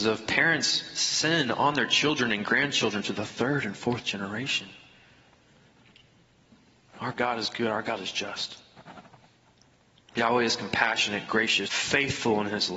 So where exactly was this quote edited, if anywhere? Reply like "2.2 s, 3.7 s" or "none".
11.6 s